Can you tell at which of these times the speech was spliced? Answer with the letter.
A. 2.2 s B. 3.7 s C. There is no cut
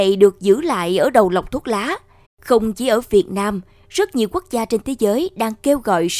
A